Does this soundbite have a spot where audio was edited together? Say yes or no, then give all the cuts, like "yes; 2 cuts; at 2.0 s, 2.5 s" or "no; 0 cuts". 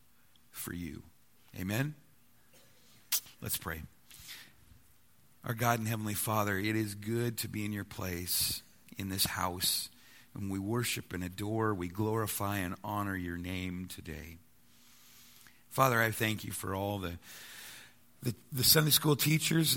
no; 0 cuts